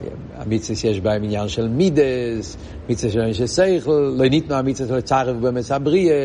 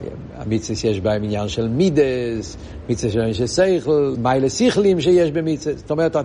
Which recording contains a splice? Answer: second; 1 cut; at 4.1 s

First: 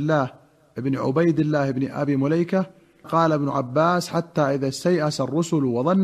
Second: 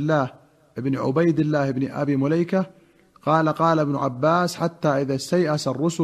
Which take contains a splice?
first; 1 cut; at 3.0 s

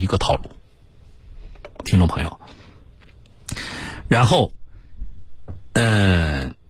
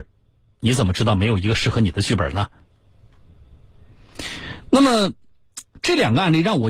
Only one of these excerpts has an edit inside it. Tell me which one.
first; 1 cut; at 1.8 s

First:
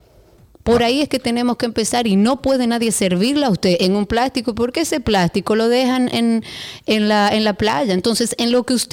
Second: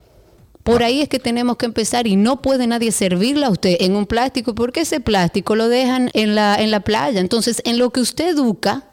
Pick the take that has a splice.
second; 1 cut; at 6.1 s

